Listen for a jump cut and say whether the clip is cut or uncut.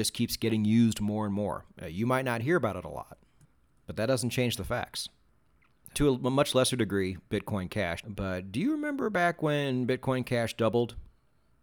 cut